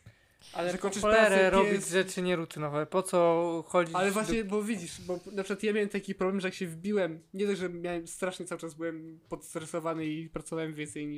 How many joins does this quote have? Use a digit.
0